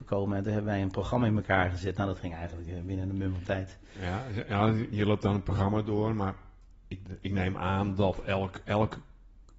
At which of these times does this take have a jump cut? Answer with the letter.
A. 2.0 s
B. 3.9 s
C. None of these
C